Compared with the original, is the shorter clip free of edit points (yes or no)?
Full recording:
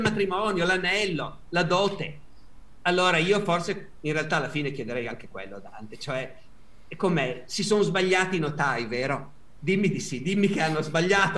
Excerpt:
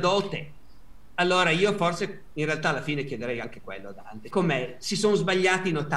no